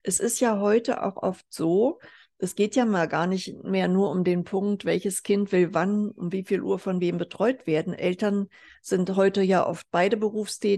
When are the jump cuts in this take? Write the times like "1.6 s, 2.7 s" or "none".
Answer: none